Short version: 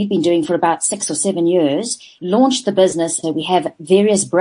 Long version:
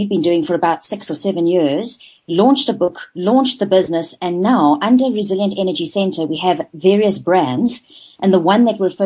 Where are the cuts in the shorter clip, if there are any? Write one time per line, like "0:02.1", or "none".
0:02.2
0:03.2